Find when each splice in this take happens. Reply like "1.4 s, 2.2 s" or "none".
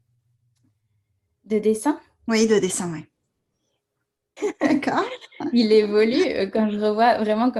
4.4 s